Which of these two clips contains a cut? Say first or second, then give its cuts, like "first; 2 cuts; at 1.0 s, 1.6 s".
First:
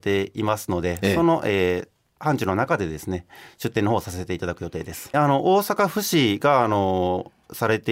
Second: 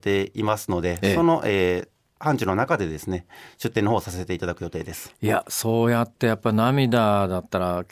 first; 1 cut; at 5.1 s